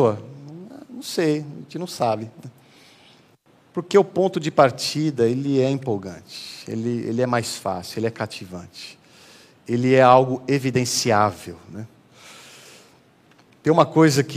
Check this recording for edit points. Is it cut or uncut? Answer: uncut